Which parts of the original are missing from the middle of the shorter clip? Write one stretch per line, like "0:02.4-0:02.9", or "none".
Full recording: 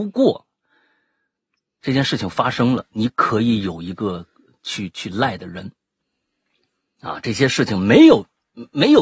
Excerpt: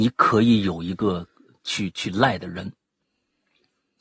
none